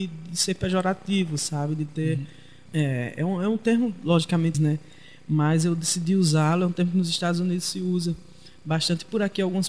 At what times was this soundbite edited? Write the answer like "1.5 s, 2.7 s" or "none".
2.7 s, 4.5 s